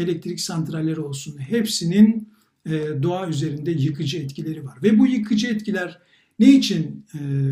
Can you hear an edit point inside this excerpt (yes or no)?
no